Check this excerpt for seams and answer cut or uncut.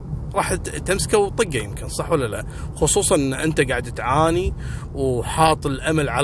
uncut